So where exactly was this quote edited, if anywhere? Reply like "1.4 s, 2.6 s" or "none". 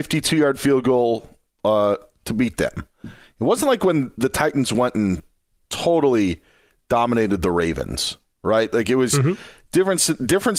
none